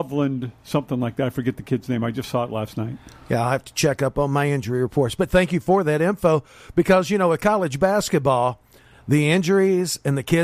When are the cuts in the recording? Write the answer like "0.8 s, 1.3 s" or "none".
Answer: none

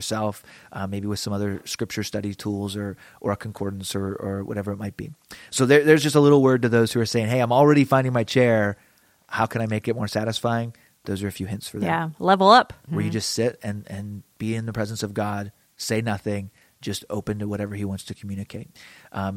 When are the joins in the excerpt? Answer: 12.9 s

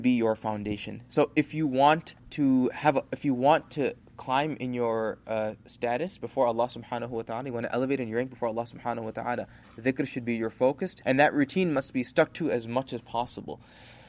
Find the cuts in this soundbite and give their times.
11.0 s

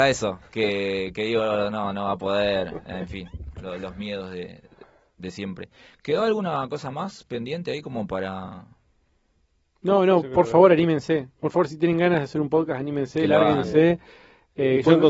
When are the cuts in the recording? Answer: none

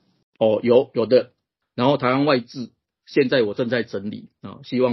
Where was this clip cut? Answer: 1.6 s

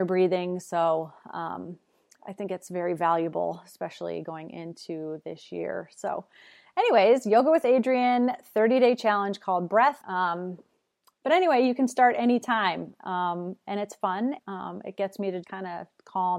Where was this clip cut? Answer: 10.0 s, 14.4 s, 15.4 s

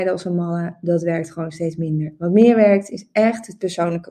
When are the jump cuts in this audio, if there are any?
none

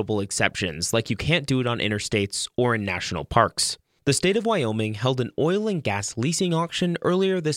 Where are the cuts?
4.0 s

